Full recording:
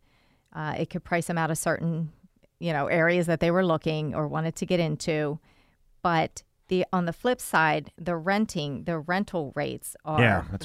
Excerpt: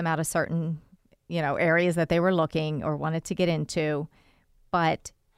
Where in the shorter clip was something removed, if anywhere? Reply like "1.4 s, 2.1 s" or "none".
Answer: none